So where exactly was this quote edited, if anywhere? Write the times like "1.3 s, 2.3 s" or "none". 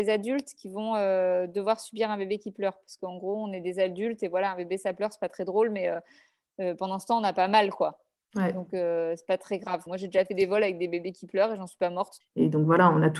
9.9 s, 12.2 s